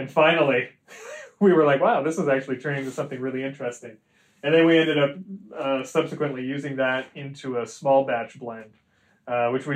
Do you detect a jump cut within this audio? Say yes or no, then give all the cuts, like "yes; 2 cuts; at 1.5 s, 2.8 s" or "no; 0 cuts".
no; 0 cuts